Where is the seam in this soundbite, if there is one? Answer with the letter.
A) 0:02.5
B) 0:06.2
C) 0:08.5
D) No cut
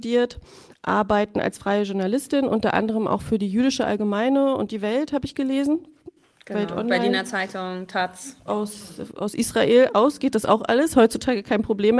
C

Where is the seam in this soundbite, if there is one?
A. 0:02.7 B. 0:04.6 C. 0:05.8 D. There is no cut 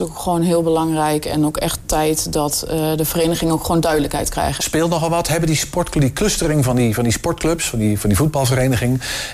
B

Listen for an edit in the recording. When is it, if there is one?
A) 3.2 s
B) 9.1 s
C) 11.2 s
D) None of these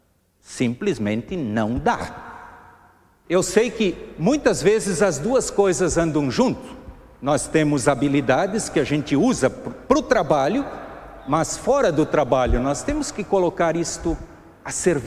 A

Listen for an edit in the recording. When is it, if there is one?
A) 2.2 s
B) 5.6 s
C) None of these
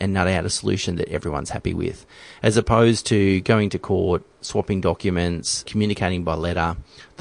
B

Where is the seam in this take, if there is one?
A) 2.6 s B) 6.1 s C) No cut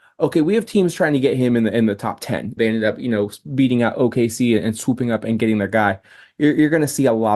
A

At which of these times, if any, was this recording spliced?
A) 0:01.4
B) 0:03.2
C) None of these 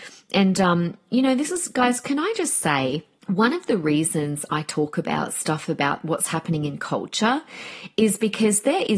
B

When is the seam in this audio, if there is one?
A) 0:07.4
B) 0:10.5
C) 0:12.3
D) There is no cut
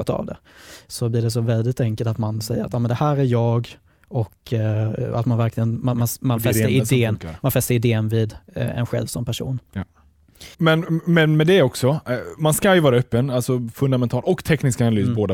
B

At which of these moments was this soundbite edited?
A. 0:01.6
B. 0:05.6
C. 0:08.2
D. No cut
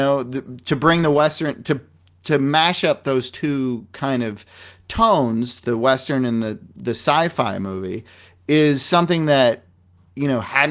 D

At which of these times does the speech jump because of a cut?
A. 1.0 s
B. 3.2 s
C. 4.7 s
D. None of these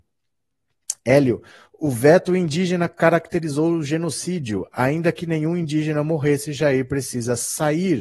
D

